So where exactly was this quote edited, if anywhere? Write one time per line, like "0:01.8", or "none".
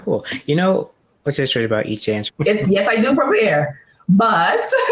0:02.3